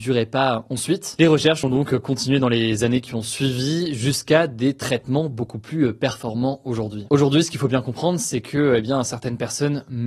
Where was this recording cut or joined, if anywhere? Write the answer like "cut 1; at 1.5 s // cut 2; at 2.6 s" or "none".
none